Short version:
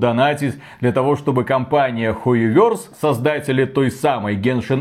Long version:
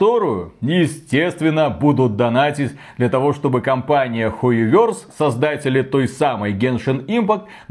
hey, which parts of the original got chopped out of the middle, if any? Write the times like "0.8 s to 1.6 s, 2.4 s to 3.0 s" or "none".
none

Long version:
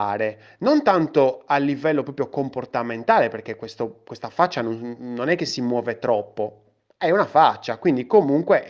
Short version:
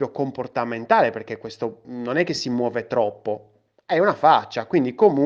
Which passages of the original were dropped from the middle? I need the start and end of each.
4.0 s to 5.0 s

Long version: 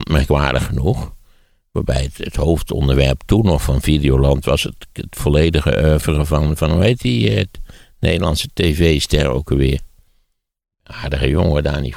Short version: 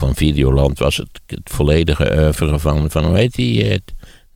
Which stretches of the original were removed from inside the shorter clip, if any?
none

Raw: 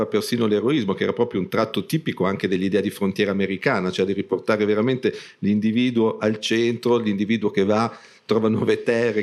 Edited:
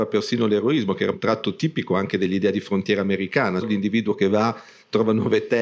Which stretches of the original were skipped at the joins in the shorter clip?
1.1 s to 1.4 s, 3.9 s to 7.0 s

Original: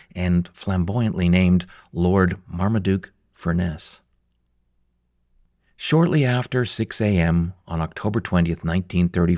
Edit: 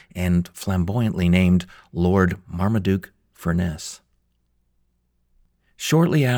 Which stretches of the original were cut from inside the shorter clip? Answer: none

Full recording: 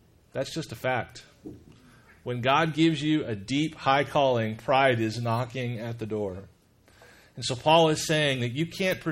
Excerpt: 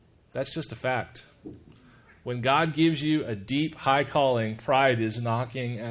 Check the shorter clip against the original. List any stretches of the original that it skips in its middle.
none

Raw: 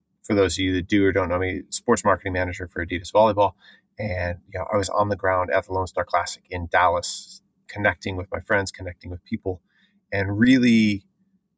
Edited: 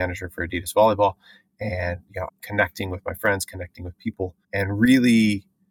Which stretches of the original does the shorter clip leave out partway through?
4.7 s to 7.5 s, 9.7 s to 10.0 s

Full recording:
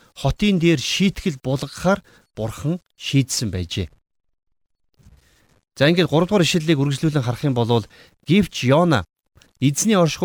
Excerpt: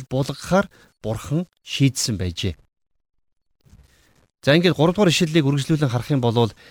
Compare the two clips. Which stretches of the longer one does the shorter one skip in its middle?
none

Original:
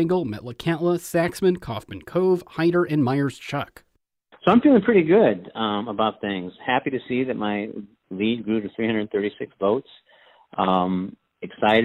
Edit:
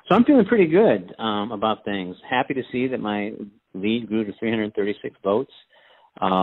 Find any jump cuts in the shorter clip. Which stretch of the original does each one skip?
none

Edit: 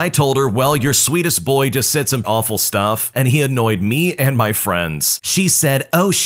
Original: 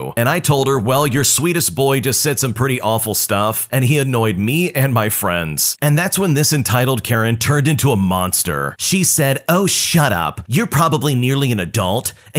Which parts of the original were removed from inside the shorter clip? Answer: 2.5 s to 2.8 s, 5.8 s to 8.8 s

